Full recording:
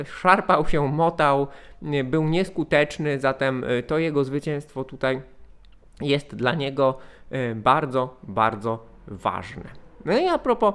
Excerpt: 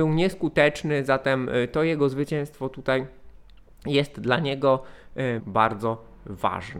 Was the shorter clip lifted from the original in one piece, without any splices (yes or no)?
no